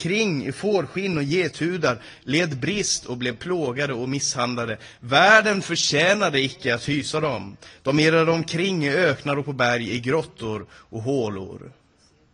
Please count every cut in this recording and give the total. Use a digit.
0